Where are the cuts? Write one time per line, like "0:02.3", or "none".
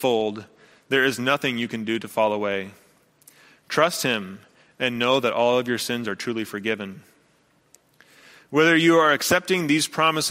none